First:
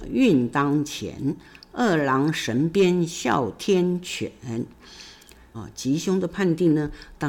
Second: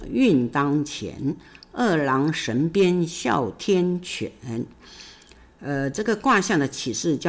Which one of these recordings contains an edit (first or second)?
first